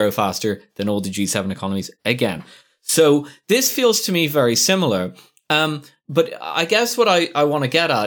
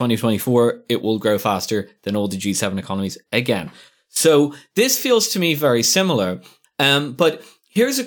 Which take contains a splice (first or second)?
second